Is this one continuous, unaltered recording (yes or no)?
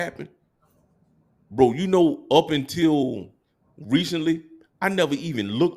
yes